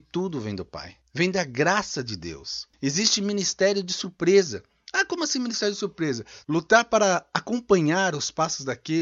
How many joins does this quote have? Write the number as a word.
one